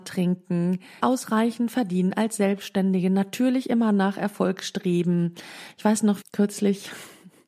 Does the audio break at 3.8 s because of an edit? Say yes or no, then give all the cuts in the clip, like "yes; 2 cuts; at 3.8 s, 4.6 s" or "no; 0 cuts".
no; 2 cuts; at 1.0 s, 6.2 s